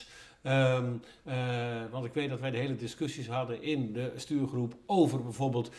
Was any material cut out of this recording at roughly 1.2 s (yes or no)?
yes